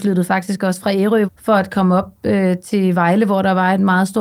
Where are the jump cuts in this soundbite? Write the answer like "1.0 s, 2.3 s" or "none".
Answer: 1.3 s